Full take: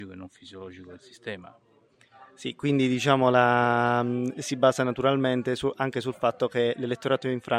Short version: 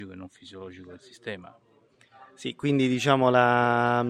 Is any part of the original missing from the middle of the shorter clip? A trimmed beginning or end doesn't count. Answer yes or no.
no